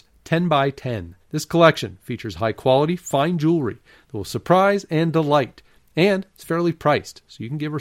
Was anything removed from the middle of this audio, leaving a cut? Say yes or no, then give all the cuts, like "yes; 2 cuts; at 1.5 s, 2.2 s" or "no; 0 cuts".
yes; 1 cut; at 1.2 s